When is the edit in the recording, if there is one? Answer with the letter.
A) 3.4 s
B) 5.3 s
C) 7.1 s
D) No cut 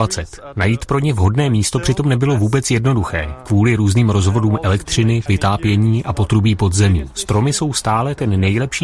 B